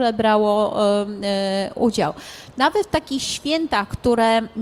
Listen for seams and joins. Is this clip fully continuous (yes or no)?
no